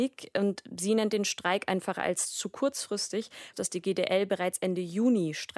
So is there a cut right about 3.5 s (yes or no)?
yes